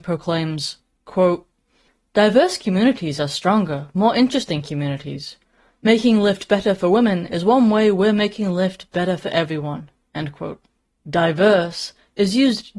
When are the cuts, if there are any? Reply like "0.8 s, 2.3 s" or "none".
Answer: 11.0 s